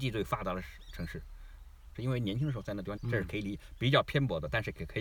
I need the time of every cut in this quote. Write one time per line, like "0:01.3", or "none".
0:01.9
0:03.0